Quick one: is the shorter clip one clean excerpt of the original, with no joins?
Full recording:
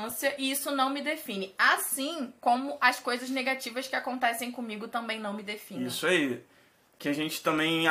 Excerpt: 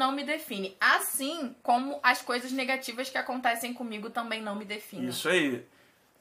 yes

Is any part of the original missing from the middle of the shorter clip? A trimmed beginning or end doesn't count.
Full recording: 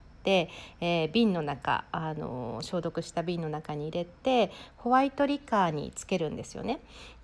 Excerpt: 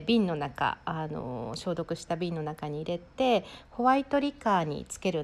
no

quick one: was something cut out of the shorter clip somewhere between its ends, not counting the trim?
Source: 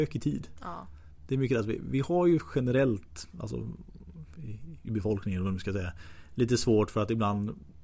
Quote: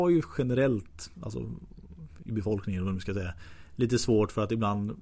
yes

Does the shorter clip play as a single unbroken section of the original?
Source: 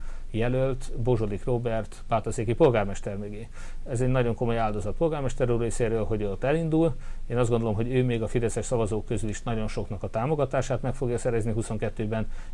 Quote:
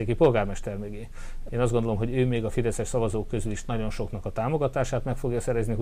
no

